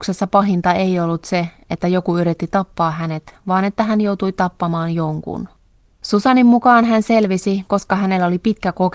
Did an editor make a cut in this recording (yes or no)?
no